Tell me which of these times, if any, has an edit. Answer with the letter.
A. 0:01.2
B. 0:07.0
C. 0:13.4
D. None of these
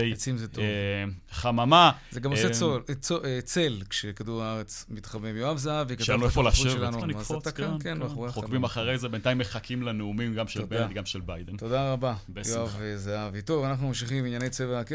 B